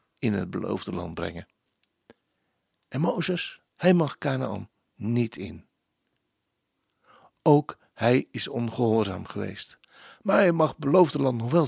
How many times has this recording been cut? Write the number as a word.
one